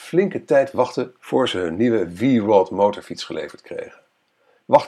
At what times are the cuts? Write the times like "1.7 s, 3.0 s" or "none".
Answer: none